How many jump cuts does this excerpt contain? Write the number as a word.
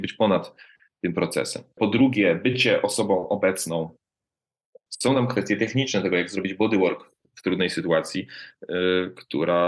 two